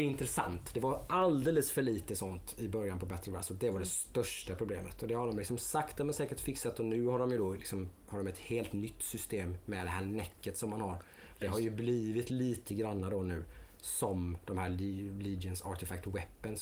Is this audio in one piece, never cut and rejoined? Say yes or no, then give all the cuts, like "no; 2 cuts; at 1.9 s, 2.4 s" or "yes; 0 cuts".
yes; 0 cuts